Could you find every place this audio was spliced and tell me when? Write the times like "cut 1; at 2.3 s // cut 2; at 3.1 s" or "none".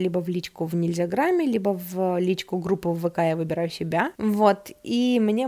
cut 1; at 4.1 s